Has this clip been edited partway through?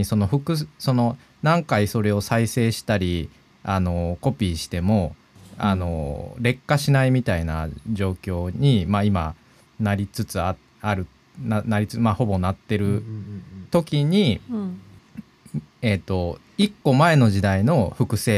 no; 0 cuts

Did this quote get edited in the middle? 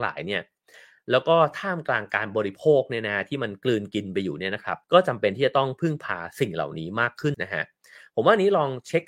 yes; 2 cuts; at 4.8 s, 7.3 s

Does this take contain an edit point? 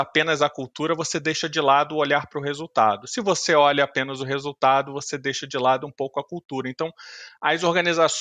no; 0 cuts

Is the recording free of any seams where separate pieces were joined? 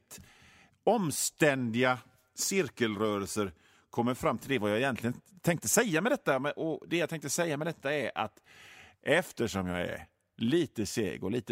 yes; 0 cuts

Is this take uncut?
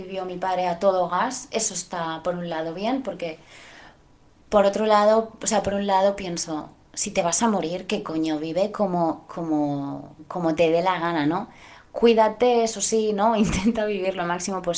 yes; 0 cuts

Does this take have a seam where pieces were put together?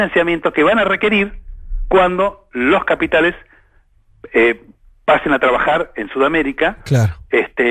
no; 0 cuts

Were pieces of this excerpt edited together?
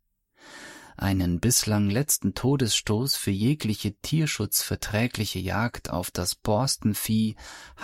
no; 0 cuts

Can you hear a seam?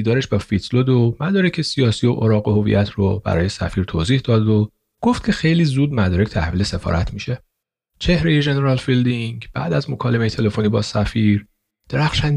no; 0 cuts

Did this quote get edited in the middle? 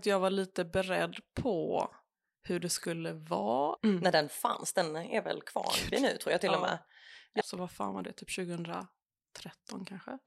yes; 2 cuts; at 3.8 s, 7.4 s

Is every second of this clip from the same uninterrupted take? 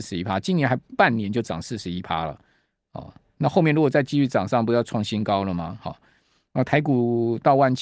yes; 0 cuts

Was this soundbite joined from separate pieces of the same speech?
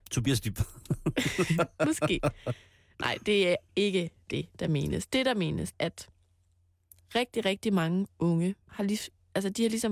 yes; 2 cuts; at 5.7 s, 8.7 s

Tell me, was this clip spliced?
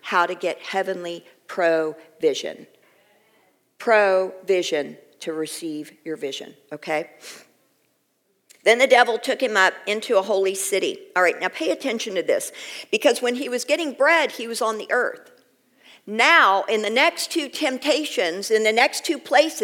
no; 0 cuts

